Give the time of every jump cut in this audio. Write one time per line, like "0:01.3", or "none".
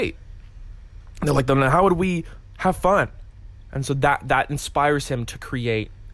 none